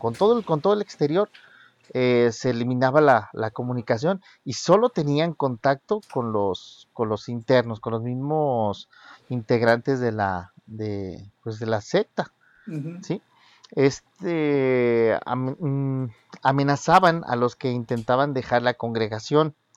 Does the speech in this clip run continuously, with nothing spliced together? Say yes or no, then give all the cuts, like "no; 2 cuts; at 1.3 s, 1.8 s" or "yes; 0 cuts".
yes; 0 cuts